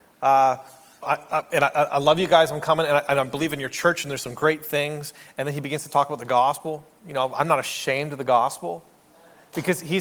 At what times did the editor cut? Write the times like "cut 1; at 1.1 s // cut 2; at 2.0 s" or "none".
cut 1; at 1.0 s